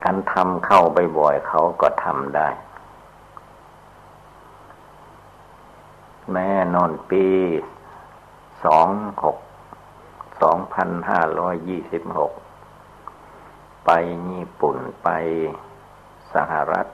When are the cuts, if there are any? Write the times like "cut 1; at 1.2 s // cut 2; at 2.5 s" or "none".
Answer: none